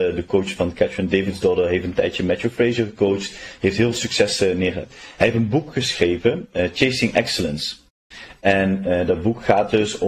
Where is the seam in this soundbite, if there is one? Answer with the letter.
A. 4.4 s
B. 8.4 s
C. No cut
C